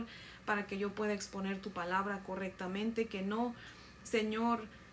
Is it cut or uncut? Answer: uncut